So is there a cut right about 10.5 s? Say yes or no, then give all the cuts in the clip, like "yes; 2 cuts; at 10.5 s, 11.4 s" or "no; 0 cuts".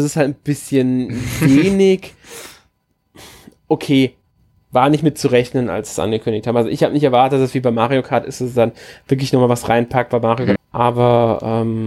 yes; 1 cut; at 10.5 s